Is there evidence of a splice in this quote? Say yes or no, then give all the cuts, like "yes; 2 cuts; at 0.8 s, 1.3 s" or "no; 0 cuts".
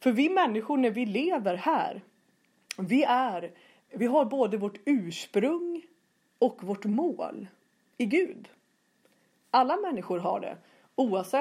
no; 0 cuts